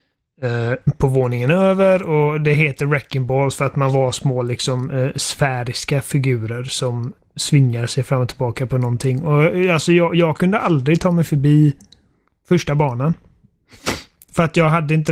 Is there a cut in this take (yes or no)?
no